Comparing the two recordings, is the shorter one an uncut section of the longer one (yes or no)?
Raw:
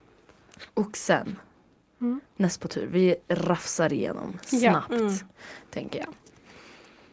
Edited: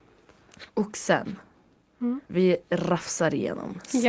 no